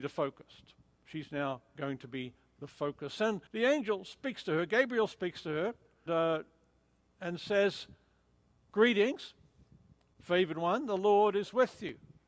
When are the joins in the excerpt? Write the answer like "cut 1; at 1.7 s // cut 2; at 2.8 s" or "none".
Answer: cut 1; at 3.5 s // cut 2; at 6.1 s